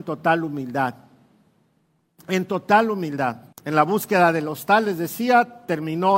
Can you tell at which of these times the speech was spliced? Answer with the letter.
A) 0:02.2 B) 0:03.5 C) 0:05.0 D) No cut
B